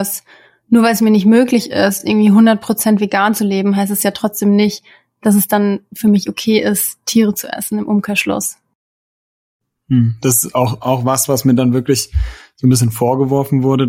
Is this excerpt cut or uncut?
uncut